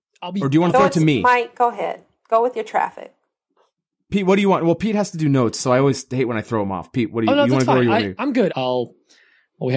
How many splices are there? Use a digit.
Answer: 1